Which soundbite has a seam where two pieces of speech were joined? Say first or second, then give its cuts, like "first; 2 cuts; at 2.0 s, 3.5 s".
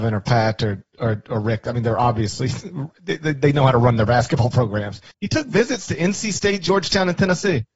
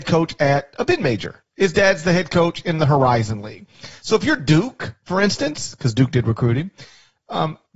first; 1 cut; at 5.1 s